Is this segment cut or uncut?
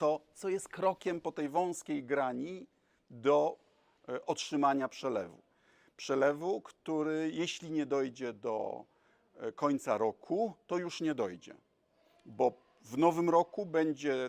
uncut